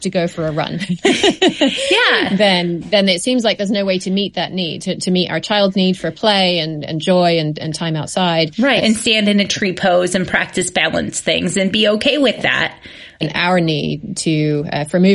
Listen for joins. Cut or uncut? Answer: cut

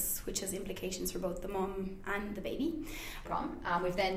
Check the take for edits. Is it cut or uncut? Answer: cut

